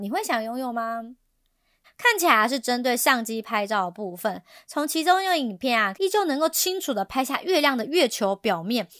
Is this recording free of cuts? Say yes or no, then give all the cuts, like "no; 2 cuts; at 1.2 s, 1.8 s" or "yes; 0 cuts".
no; 2 cuts; at 1.8 s, 5.9 s